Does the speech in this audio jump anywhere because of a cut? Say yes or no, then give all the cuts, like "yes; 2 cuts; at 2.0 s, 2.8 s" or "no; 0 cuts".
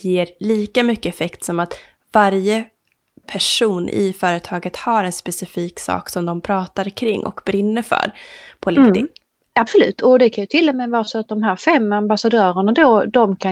yes; 1 cut; at 9.5 s